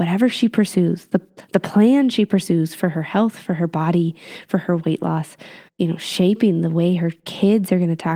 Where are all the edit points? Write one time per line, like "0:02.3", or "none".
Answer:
0:05.7